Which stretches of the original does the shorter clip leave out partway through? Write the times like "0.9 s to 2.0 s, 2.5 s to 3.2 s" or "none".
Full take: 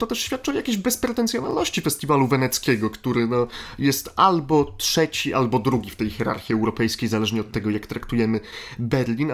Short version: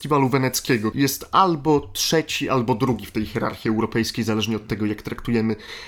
2.9 s to 3.8 s